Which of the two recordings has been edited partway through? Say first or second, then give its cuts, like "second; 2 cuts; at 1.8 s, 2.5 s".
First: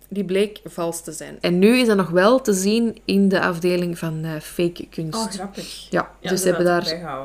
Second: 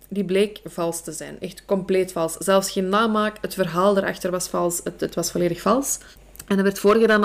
first; 1 cut; at 1.4 s